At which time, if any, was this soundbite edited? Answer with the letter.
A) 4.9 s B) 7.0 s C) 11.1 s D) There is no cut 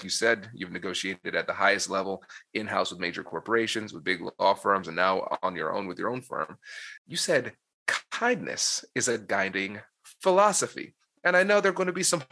B